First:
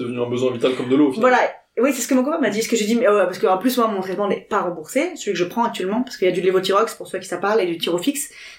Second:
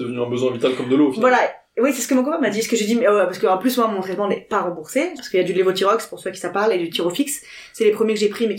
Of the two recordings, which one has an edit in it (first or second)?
second